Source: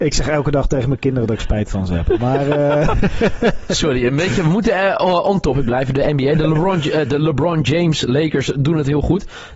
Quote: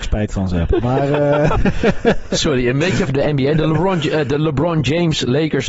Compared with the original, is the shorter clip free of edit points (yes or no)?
no